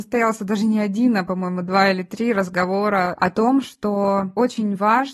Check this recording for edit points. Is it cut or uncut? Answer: uncut